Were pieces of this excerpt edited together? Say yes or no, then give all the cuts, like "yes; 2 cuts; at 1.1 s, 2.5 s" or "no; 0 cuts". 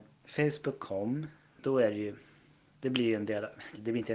yes; 1 cut; at 1.6 s